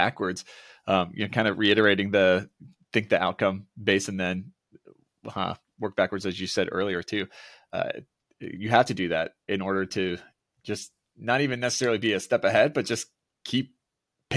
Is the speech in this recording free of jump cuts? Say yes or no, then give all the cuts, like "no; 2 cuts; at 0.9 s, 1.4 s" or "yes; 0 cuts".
yes; 0 cuts